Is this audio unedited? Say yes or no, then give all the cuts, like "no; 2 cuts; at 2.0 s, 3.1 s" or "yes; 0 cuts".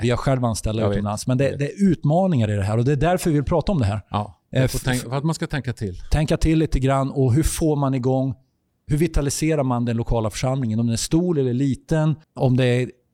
no; 1 cut; at 12.2 s